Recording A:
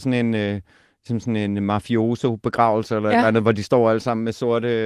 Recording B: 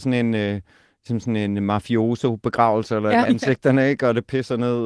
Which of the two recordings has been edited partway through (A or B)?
B